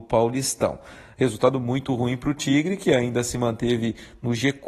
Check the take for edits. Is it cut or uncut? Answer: cut